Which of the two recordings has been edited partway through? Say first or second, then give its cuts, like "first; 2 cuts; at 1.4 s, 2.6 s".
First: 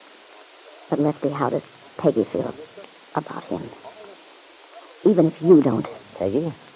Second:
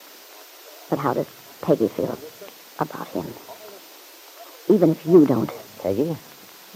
second; 1 cut; at 1.0 s